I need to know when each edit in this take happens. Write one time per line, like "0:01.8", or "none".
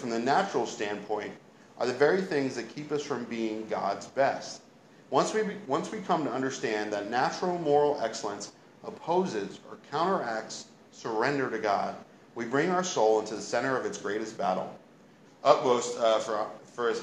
0:15.2